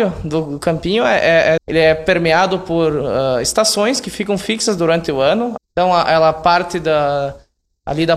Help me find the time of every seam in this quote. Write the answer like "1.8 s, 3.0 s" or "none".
1.6 s, 5.6 s